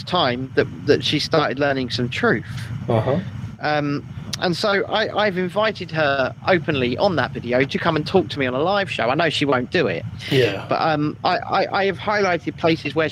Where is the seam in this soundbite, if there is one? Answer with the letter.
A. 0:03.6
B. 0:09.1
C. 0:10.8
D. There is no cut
D